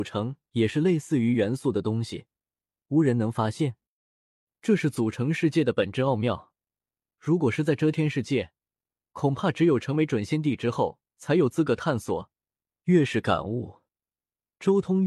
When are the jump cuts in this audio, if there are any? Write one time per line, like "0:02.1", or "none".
0:02.7
0:11.1
0:12.8